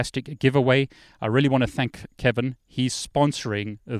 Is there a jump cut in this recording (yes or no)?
no